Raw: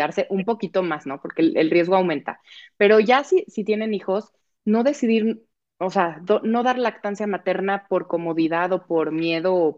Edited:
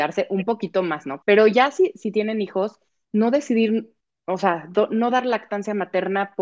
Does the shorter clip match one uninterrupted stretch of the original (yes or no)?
no